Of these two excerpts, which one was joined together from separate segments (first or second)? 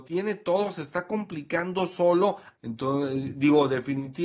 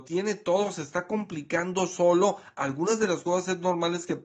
first